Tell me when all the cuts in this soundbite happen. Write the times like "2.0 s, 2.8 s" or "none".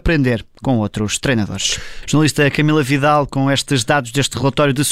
2.0 s